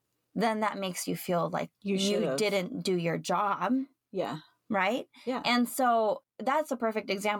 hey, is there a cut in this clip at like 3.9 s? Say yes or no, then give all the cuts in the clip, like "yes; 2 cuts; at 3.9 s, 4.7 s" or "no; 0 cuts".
no; 2 cuts; at 1.7 s, 6.2 s